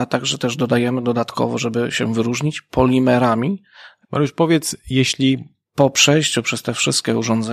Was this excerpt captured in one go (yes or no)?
no